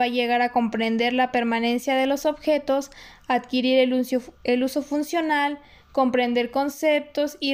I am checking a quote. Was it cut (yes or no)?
no